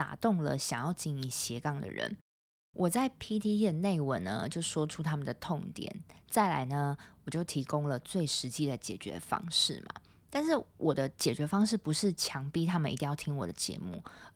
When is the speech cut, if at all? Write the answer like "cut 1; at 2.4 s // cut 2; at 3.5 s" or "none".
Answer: none